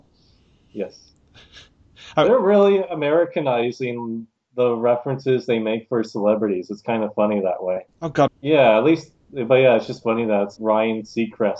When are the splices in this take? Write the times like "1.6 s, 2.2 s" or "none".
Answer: 8.3 s, 10.6 s